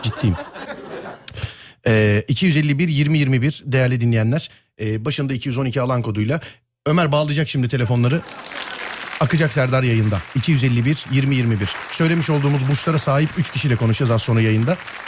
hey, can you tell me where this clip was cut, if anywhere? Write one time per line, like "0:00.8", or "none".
none